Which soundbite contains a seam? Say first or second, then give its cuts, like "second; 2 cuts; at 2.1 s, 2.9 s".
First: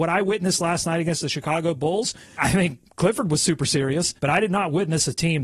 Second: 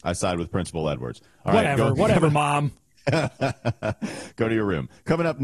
first; 2 cuts; at 2.4 s, 4.2 s